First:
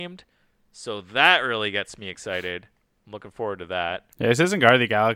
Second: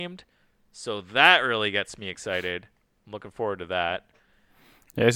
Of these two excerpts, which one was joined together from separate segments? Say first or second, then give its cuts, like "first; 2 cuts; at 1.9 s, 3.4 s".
first; 1 cut; at 4.1 s